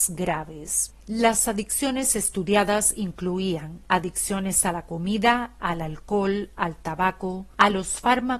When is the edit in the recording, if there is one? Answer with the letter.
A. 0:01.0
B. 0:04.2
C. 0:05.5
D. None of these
D